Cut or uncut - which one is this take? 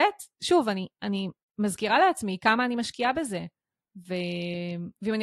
uncut